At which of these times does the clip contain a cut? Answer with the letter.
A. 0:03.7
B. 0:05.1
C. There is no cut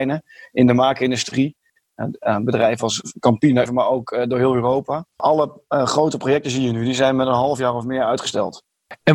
A